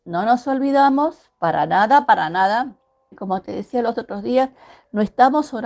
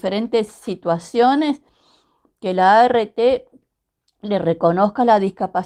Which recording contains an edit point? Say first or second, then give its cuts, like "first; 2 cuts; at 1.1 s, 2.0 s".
first; 1 cut; at 3.1 s